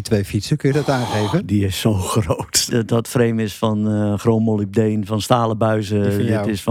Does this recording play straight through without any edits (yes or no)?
no